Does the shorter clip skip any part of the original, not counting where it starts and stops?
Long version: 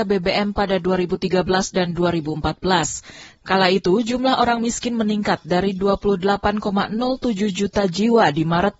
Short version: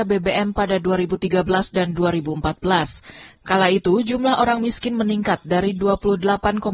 no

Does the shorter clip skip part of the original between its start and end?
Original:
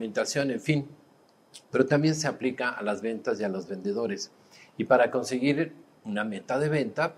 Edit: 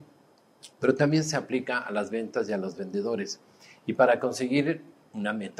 no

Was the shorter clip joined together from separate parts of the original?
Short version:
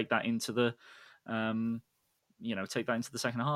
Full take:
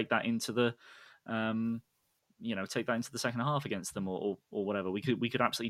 no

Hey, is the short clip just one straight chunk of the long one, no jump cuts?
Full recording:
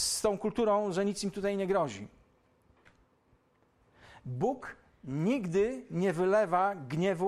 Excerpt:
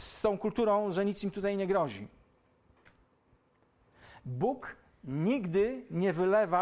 yes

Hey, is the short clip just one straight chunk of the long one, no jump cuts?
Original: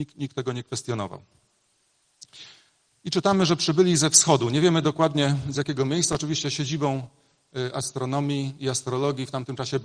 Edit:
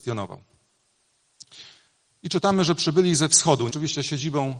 no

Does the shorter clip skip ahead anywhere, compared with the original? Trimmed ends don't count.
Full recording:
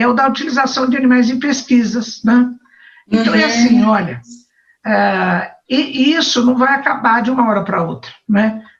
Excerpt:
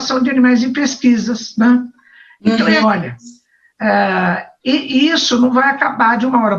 yes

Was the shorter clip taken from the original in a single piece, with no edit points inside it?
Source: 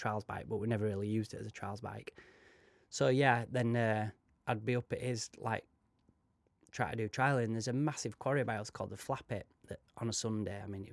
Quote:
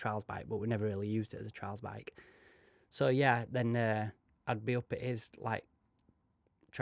yes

